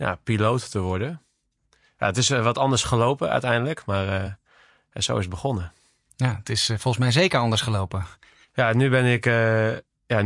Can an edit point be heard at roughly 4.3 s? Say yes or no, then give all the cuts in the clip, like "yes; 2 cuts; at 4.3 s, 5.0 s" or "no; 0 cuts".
no; 0 cuts